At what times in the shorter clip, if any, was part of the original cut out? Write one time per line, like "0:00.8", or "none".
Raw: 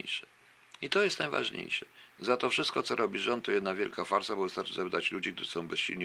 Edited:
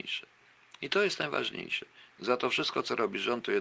none